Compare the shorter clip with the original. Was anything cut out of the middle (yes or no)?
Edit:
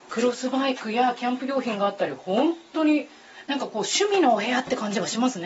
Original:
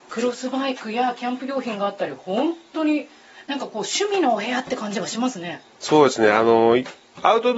no